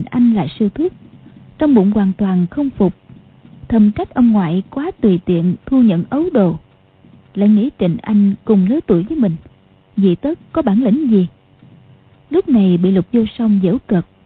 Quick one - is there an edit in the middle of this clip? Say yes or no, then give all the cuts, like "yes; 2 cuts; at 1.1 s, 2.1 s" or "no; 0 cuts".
no; 0 cuts